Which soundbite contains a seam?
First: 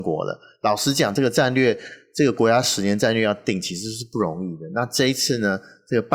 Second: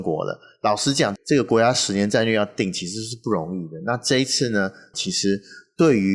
second; 2 cuts; at 1.2 s, 4.9 s

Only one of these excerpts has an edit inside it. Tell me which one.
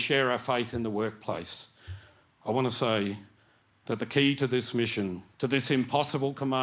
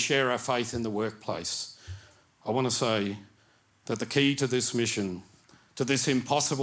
first; 1 cut; at 5.3 s

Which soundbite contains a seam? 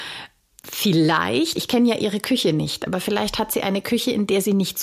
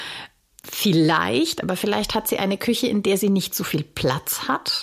second; 1 cut; at 1.6 s

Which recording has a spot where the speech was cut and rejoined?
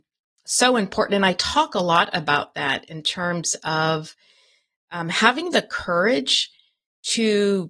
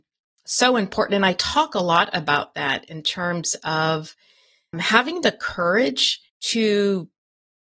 second; 2 cuts; at 4.7 s, 6.3 s

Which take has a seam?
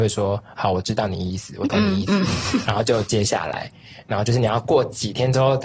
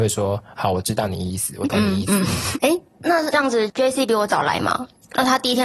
second; 1 cut; at 2.5 s

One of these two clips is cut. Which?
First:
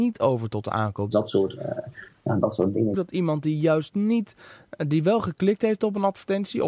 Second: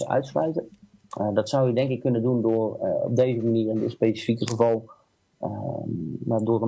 first; 2 cuts; at 1.1 s, 2.9 s

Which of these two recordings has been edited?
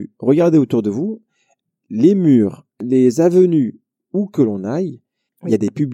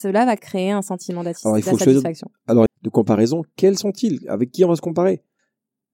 second; 1 cut; at 2.7 s

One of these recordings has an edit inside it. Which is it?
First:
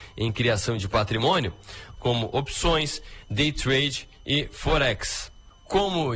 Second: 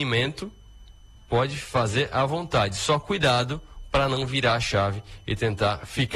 first; 1 cut; at 2.0 s

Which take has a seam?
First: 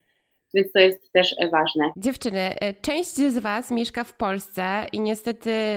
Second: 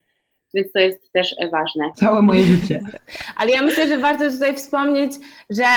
second; 1 cut; at 1.9 s

